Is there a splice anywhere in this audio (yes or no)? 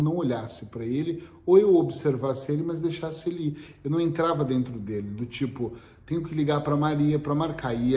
no